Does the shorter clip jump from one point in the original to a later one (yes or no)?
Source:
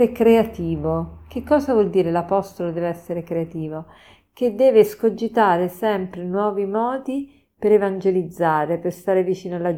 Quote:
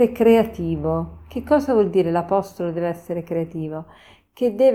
no